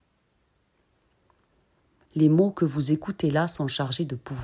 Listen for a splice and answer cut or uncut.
uncut